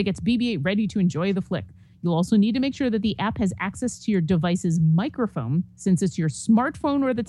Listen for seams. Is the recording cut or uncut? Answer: uncut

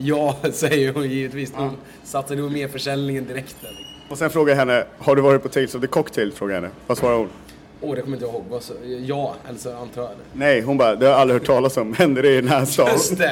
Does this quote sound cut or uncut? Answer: cut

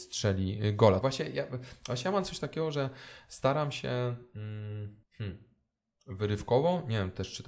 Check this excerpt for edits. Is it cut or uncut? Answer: cut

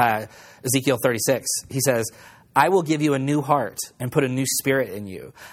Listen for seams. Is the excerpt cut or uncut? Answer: uncut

